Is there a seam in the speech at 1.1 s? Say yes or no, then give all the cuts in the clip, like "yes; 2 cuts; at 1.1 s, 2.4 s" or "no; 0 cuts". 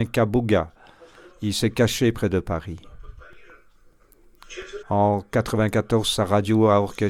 no; 1 cut; at 4.8 s